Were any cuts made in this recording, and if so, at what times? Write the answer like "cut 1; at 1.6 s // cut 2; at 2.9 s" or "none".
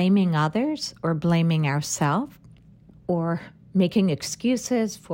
cut 1; at 2.9 s